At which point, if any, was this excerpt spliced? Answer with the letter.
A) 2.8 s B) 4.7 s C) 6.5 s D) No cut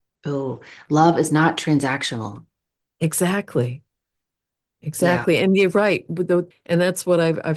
C